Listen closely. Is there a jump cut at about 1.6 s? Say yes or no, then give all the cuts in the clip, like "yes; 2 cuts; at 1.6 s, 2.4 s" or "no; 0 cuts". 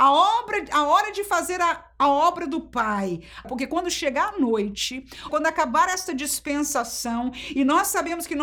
no; 2 cuts; at 3.4 s, 5.3 s